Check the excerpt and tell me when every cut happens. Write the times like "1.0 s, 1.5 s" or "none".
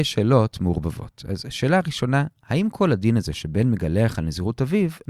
none